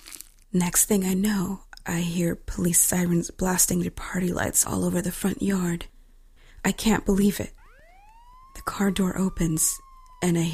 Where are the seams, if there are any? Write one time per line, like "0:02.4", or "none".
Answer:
none

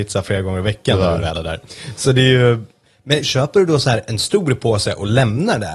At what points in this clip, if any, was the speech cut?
0:03.2

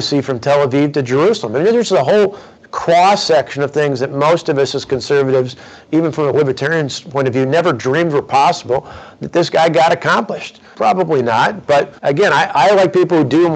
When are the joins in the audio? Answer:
0:10.7
0:12.0

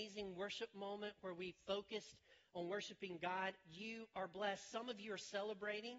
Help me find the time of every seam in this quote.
none

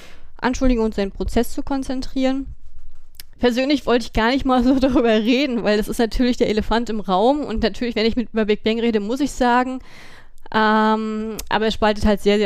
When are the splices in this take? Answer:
0:03.3

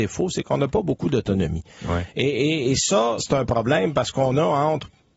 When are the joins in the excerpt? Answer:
0:03.2

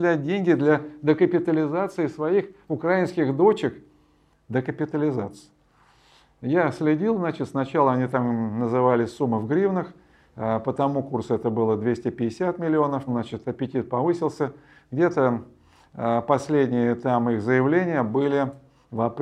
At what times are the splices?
0:04.3
0:13.1

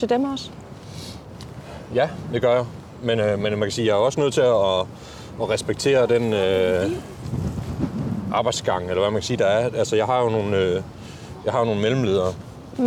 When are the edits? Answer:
none

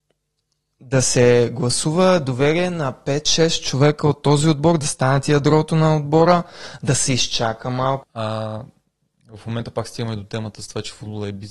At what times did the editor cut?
0:08.0

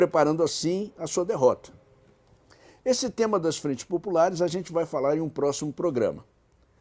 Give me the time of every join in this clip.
none

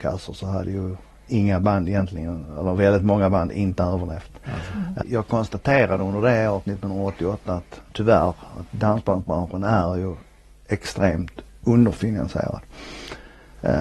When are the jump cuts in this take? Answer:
0:05.0
0:07.9

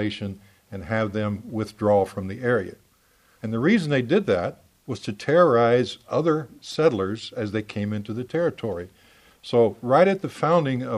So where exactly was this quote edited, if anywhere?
0:03.4

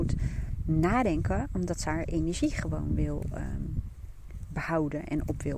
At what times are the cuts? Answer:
none

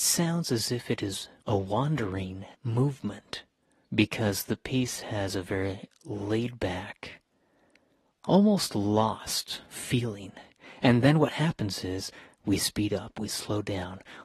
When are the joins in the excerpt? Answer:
0:02.5
0:10.8

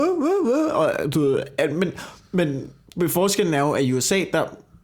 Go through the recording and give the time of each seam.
none

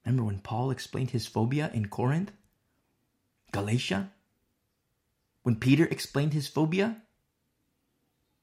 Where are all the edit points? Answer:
none

